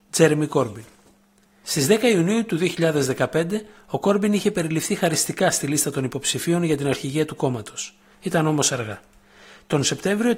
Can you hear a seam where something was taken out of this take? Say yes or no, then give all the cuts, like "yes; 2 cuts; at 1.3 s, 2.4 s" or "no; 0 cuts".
yes; 1 cut; at 8.1 s